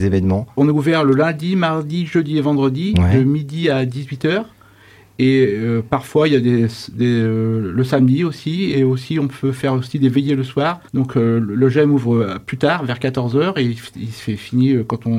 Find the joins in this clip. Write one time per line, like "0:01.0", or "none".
0:10.9